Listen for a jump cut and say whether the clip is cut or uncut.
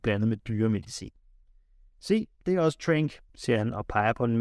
uncut